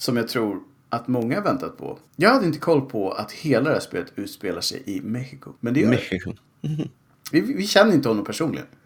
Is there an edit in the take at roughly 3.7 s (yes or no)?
no